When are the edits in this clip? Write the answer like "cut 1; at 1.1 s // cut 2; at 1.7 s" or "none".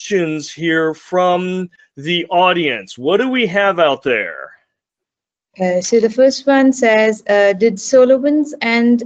none